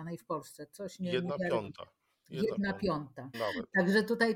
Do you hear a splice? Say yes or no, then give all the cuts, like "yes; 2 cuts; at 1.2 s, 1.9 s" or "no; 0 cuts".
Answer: yes; 1 cut; at 3.3 s